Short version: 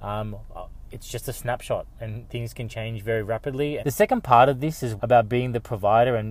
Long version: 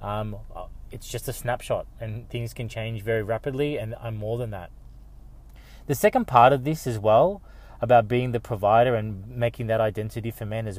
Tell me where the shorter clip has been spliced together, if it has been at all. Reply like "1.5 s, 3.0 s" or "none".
3.8 s, 5.0 s